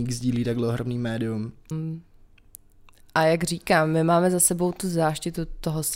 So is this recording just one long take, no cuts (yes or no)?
no